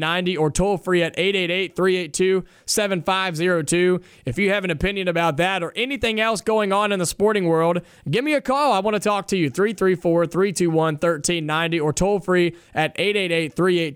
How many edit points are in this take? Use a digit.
0